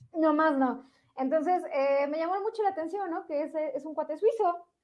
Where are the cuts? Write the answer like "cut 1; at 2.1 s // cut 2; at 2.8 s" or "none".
none